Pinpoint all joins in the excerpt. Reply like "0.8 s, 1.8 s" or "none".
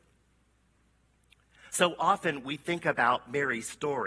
none